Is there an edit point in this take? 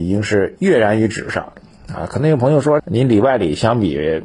yes; 1 cut; at 2.8 s

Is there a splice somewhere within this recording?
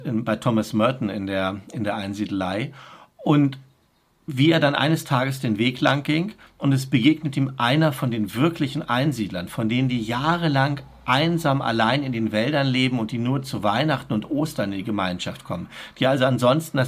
no; 0 cuts

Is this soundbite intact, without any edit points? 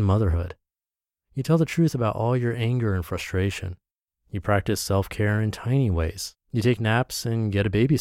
no; 1 cut; at 6.4 s

